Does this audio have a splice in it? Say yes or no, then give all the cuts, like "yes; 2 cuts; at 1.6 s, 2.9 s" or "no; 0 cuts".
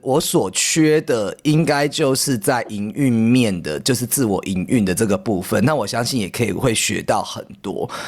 no; 0 cuts